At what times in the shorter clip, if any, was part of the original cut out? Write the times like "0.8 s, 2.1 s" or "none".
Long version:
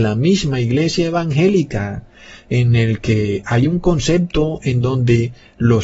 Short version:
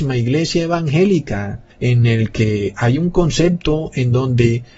1.7 s